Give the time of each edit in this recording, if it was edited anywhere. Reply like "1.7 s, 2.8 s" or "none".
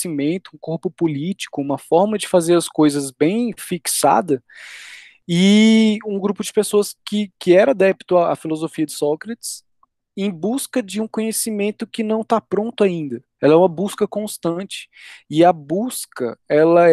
13.4 s